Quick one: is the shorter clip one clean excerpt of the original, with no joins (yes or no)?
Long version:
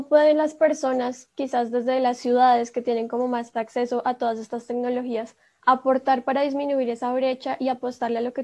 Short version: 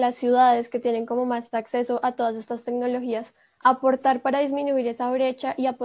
yes